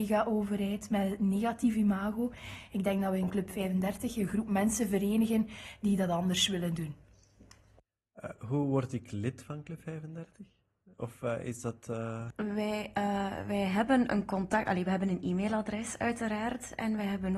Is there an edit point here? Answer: no; 0 cuts

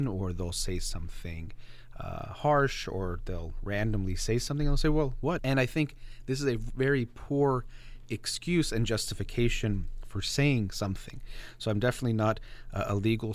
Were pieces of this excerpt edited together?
yes; 1 cut; at 5.4 s

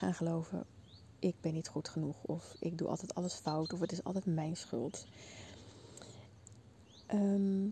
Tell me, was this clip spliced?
no; 0 cuts

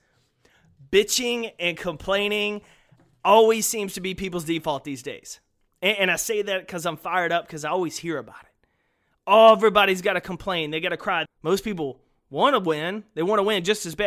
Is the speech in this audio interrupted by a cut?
yes; 1 cut; at 11.3 s

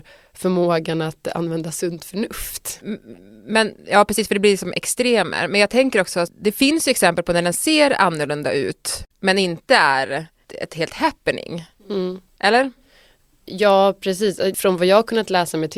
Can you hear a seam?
yes; 1 cut; at 9.1 s

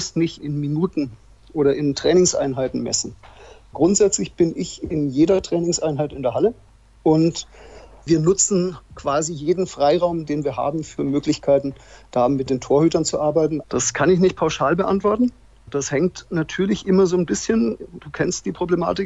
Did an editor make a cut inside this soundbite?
yes; 1 cut; at 13.6 s

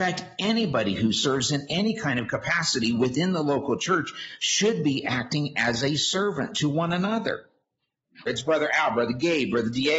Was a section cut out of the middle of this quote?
yes; 1 cut; at 8.3 s

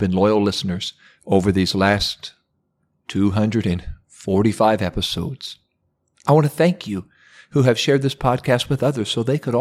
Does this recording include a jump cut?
no; 0 cuts

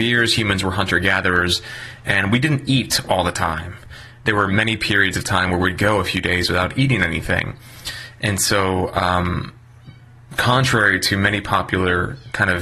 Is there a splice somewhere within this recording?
no; 0 cuts

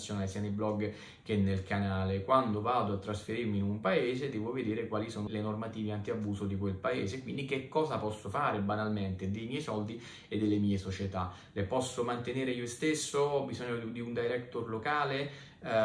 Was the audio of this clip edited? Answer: yes; 1 cut; at 5.3 s

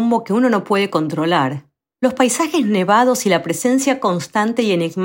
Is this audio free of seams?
no; 1 cut; at 1.9 s

